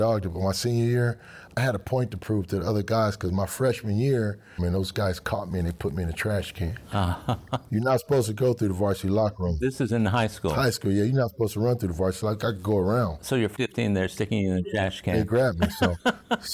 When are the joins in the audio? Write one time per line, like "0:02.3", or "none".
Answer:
0:04.6